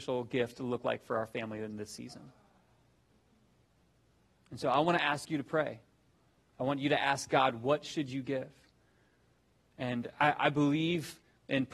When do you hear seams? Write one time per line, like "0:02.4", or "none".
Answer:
none